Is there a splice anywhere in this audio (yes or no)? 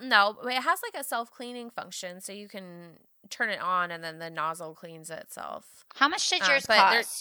yes